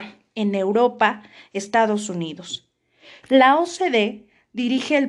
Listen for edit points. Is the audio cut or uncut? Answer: cut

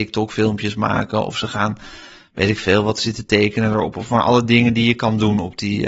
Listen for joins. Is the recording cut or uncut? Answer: uncut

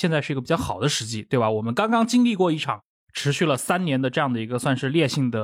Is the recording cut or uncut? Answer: uncut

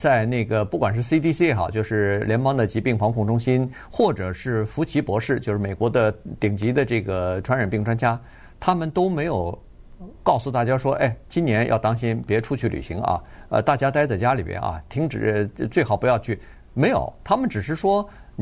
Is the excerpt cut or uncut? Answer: cut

